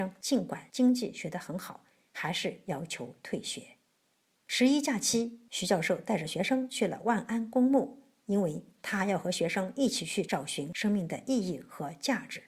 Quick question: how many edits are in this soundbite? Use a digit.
0